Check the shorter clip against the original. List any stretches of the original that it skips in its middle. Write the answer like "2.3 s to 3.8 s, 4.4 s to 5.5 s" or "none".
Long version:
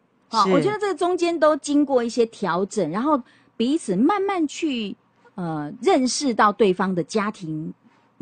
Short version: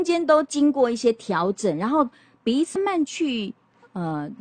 3.9 s to 4.2 s